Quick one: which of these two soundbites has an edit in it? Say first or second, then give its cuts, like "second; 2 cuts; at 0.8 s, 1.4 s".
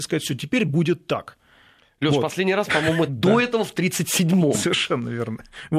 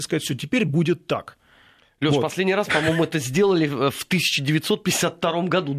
first; 1 cut; at 3.1 s